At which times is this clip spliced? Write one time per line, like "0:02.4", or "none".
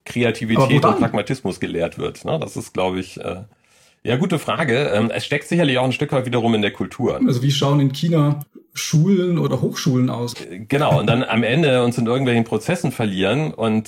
0:07.2
0:10.3